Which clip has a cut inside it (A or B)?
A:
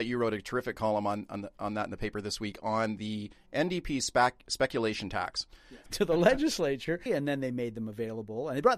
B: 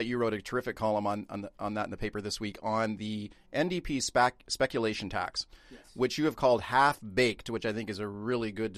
A